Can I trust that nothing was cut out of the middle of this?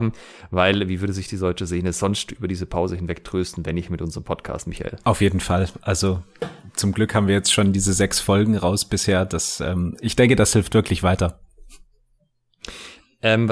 yes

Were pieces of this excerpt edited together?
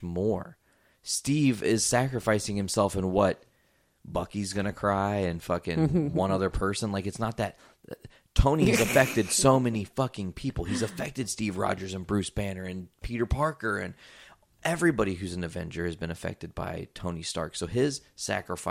no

